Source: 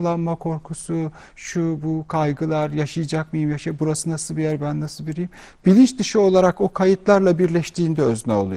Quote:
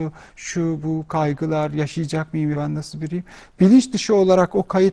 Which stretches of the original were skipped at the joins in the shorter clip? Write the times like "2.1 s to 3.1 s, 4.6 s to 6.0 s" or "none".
3.5 s to 4.6 s